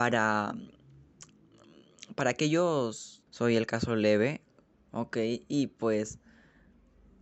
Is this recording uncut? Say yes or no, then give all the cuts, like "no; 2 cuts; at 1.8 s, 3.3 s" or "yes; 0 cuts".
no; 2 cuts; at 3.3 s, 4.7 s